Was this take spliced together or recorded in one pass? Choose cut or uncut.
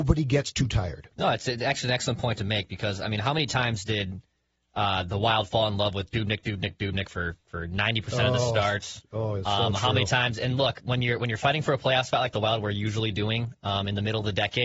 uncut